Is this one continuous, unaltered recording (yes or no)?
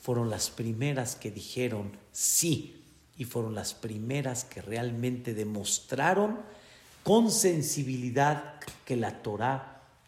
yes